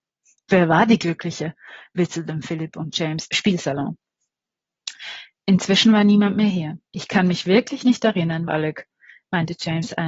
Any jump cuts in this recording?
yes; 3 cuts; at 3.3 s, 6.9 s, 8.5 s

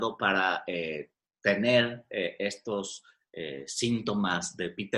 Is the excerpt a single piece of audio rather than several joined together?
yes; 0 cuts

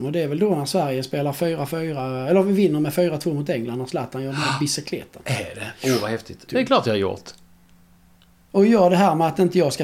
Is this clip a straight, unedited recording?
no; 1 cut; at 6.5 s

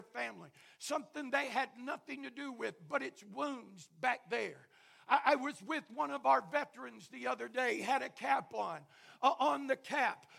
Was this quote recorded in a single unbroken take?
yes; 0 cuts

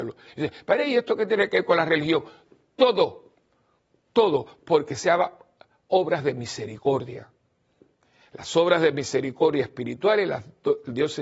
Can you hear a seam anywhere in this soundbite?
no; 0 cuts

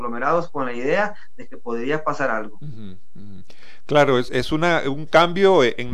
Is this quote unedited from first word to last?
no; 1 cut; at 4.3 s

